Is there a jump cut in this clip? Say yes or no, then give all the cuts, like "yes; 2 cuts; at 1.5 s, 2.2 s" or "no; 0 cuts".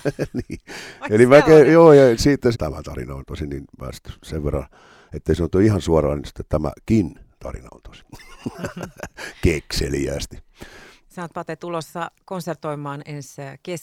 yes; 1 cut; at 2.5 s